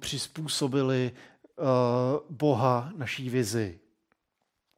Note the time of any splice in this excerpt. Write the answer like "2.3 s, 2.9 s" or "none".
none